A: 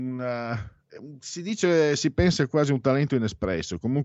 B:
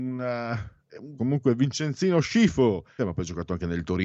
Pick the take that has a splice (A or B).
B